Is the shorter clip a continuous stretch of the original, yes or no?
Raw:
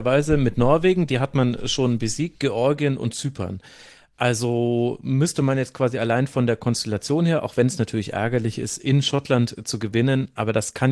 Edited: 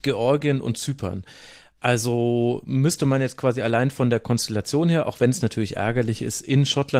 yes